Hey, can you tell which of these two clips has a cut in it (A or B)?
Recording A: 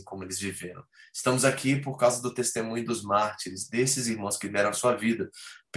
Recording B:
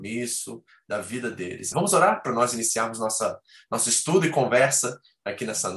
B